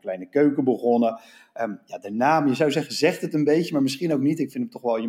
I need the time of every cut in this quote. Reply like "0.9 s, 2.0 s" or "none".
none